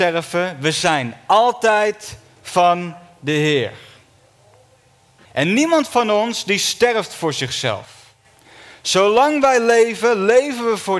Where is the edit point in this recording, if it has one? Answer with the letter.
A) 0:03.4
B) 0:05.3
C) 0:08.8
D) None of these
B